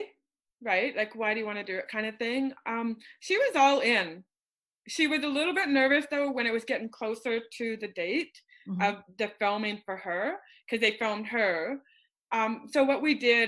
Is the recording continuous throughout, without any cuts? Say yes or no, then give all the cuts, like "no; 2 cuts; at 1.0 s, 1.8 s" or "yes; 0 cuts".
yes; 0 cuts